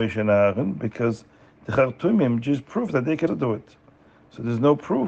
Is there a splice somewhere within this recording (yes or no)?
yes